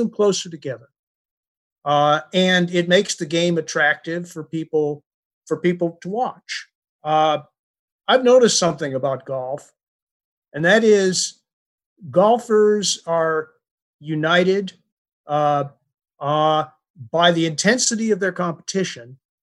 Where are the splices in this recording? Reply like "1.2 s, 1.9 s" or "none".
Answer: 7.0 s, 16.1 s

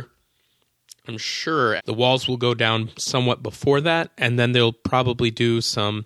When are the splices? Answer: 1.8 s

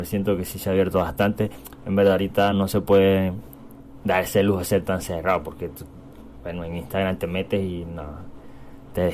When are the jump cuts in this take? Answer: 2.5 s

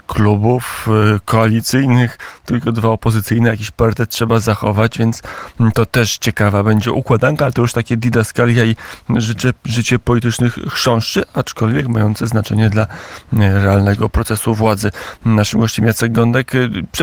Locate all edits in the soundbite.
none

